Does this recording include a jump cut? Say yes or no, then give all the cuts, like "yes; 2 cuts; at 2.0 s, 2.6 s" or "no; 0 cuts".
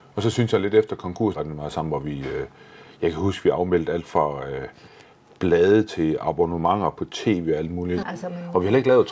yes; 2 cuts; at 1.3 s, 8.0 s